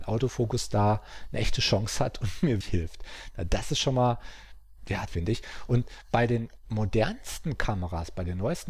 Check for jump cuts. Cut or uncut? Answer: cut